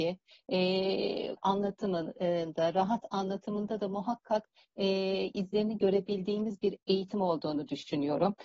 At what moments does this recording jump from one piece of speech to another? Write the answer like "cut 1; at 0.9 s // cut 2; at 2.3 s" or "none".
cut 1; at 1.4 s